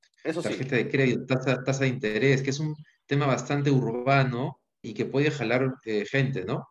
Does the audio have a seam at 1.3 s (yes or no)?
no